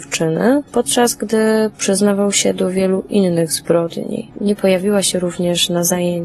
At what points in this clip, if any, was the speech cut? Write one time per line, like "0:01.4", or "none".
0:04.3